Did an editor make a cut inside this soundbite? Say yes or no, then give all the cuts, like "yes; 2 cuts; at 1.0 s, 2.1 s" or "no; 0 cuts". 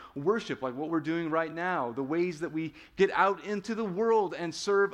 no; 0 cuts